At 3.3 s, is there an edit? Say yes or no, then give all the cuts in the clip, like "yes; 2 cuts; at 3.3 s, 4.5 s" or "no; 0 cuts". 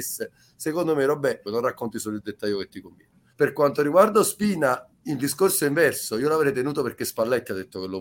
yes; 2 cuts; at 1.5 s, 3.3 s